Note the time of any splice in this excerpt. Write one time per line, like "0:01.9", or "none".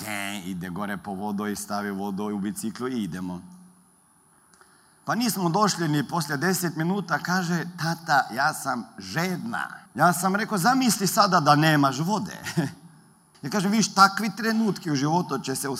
0:09.9
0:13.3